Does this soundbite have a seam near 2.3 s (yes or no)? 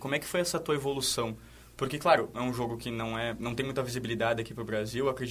yes